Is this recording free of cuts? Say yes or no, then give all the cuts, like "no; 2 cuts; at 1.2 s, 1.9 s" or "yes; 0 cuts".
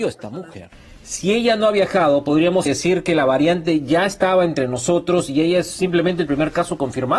no; 1 cut; at 2.7 s